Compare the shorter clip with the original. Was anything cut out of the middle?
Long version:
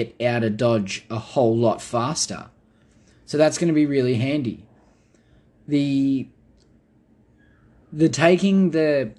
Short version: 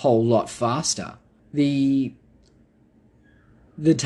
yes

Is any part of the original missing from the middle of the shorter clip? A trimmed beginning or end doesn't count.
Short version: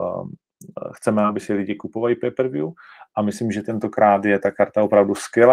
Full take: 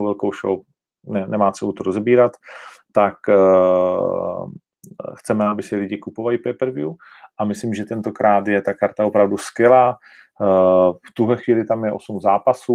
no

